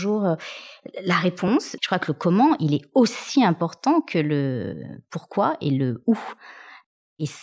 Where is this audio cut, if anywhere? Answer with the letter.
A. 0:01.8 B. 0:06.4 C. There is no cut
A